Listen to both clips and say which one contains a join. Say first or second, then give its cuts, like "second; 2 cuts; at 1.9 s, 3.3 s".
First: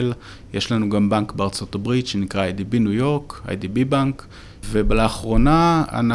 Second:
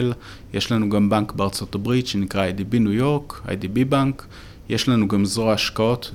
first; 1 cut; at 4.6 s